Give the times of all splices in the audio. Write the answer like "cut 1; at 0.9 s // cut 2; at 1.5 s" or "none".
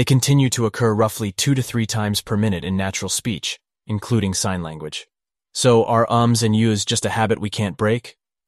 cut 1; at 3.7 s